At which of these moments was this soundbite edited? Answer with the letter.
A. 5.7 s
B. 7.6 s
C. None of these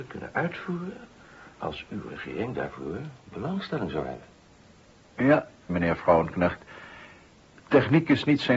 A